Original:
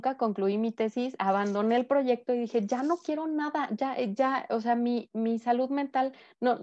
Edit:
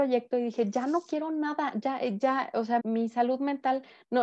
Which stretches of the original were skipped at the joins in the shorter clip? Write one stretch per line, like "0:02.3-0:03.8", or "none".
0:04.8-0:05.1